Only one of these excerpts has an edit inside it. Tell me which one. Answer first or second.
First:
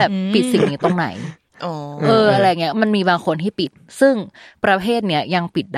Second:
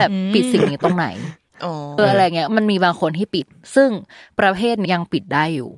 second